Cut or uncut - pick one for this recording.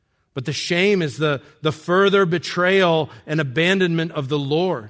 uncut